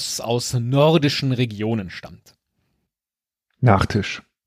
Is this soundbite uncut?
yes; 0 cuts

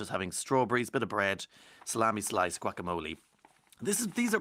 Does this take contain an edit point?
no; 0 cuts

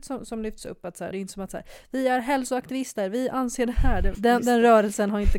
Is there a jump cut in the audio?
yes; 2 cuts; at 1.1 s, 4.1 s

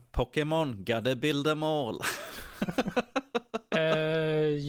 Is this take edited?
no; 0 cuts

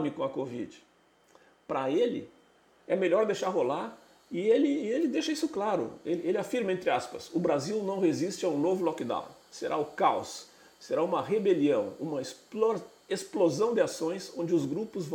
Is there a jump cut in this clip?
no; 0 cuts

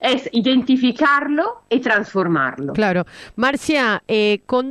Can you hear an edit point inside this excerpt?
no; 0 cuts

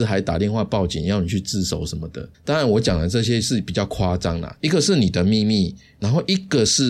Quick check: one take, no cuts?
no; 2 cuts; at 2.3 s, 4.6 s

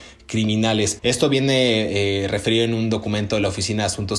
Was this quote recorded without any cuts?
no; 1 cut; at 1.0 s

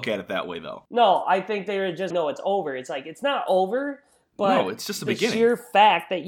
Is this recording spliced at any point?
yes; 1 cut; at 2.1 s

